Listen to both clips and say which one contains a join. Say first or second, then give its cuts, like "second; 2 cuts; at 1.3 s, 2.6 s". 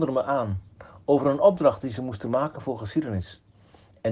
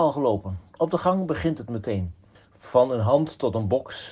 second; 1 cut; at 2.4 s